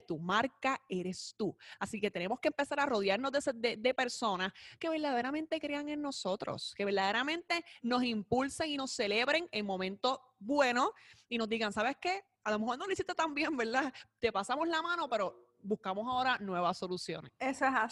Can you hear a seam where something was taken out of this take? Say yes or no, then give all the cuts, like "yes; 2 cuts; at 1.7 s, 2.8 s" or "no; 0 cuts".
no; 0 cuts